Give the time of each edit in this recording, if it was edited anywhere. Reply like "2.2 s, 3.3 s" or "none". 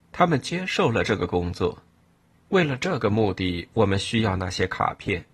2.3 s